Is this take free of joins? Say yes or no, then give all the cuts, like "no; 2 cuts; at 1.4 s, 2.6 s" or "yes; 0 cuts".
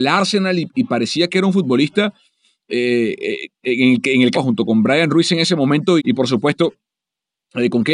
no; 2 cuts; at 4.3 s, 6.0 s